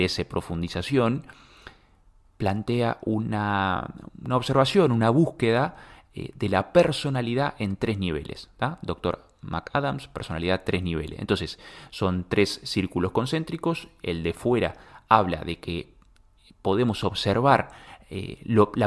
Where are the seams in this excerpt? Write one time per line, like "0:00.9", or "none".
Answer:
none